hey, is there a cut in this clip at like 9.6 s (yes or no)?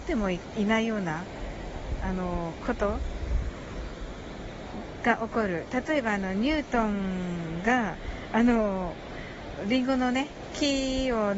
yes